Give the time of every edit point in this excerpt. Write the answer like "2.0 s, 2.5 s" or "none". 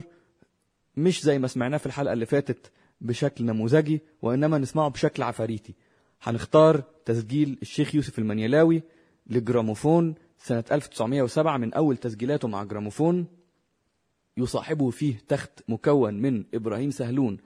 none